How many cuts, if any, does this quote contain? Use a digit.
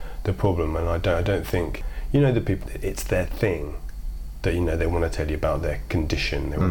1